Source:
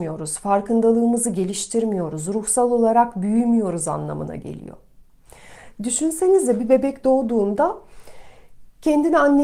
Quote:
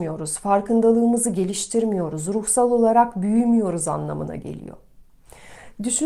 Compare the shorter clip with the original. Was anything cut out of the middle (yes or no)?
no